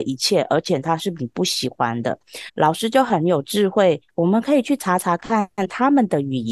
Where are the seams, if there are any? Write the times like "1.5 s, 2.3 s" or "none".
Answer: 2.5 s, 4.1 s